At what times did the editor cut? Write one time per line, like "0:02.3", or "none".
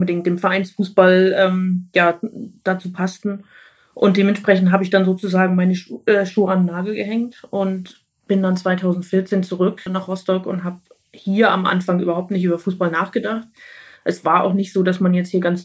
0:09.9